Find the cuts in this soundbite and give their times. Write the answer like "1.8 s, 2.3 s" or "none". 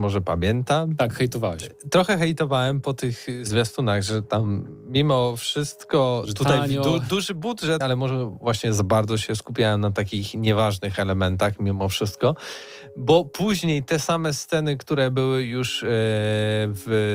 7.8 s

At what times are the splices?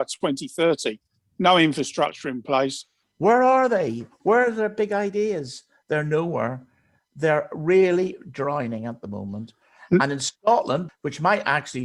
3.0 s, 10.9 s

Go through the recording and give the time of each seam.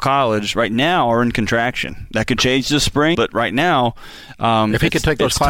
3.1 s

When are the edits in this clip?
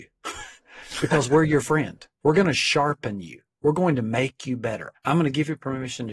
4.9 s

